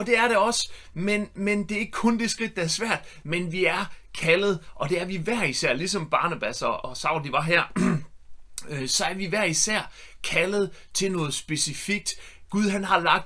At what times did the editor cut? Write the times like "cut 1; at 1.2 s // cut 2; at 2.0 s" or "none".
cut 1; at 3.2 s // cut 2; at 6.8 s